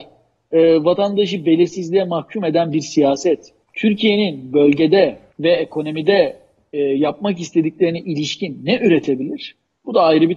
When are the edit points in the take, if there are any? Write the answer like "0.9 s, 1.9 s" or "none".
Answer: 3.6 s, 5.3 s

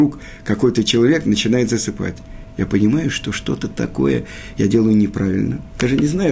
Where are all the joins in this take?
none

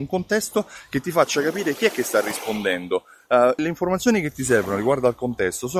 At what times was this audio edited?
3.6 s

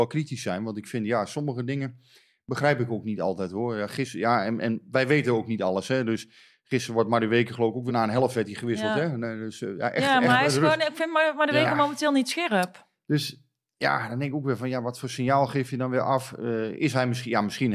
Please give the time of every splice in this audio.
7.9 s

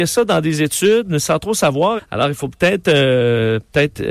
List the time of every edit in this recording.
2.0 s

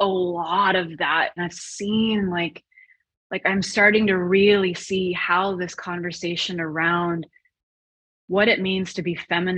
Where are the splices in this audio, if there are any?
1.4 s

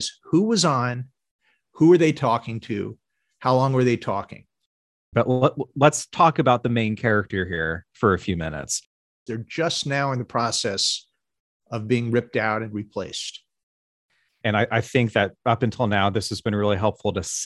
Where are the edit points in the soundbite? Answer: 5.1 s, 9.3 s, 14.4 s

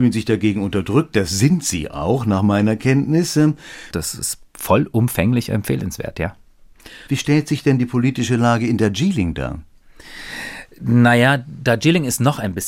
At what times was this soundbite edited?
3.9 s, 7.1 s

